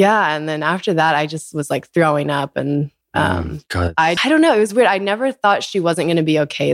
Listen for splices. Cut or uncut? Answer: cut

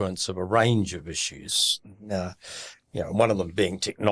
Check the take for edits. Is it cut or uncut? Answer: uncut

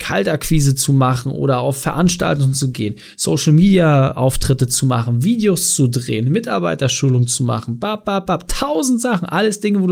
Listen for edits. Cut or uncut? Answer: uncut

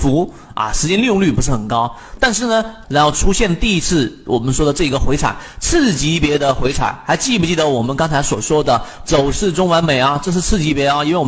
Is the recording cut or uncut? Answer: cut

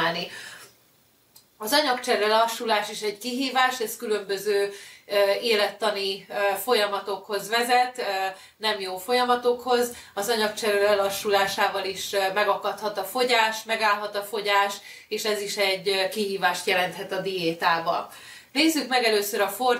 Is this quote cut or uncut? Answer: uncut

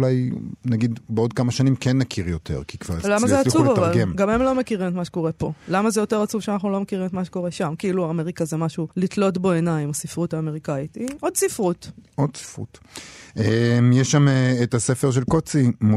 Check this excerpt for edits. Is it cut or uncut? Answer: cut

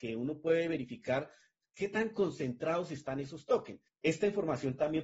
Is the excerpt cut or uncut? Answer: cut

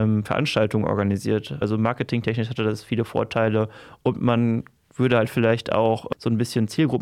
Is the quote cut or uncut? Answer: cut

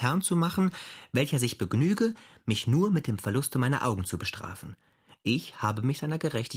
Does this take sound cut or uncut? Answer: uncut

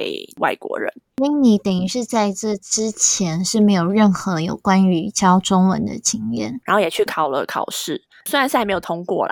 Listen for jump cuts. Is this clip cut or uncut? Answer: cut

